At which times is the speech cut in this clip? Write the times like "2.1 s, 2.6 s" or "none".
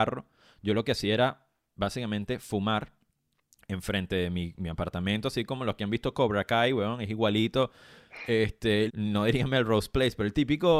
8.9 s